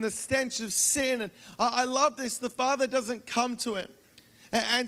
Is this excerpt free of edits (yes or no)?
yes